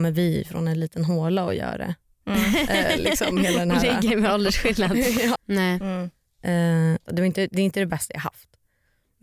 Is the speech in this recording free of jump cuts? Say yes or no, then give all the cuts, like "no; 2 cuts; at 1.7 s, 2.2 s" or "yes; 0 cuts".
no; 2 cuts; at 5.4 s, 7.1 s